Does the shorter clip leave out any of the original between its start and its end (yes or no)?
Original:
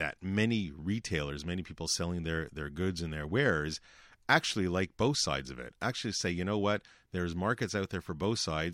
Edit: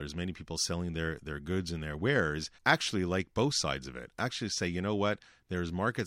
yes